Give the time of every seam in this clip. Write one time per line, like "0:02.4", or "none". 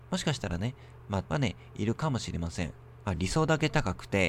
0:01.2
0:03.0